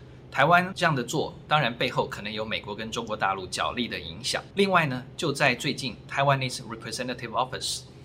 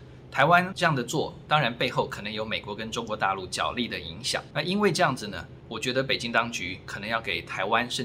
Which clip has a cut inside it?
first; 2 cuts; at 4.5 s, 6.0 s

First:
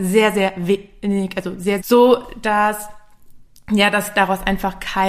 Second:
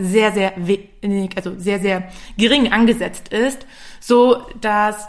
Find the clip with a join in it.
first; 1 cut; at 1.8 s

